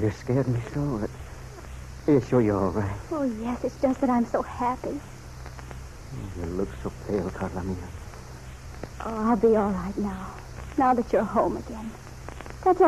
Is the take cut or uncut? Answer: cut